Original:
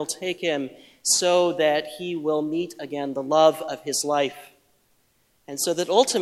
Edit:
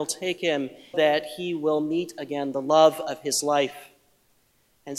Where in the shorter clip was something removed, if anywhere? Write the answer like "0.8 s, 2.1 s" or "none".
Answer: 0.9 s